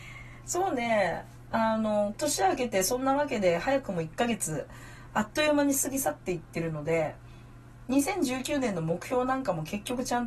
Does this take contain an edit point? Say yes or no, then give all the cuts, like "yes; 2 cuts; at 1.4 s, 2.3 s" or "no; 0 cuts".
yes; 1 cut; at 2.1 s